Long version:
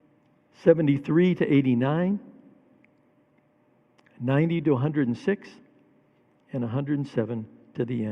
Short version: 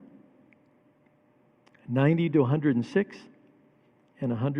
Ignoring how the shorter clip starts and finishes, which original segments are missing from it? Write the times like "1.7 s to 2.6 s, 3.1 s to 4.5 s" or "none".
none